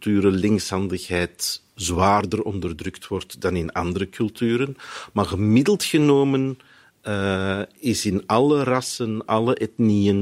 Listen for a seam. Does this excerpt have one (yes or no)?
yes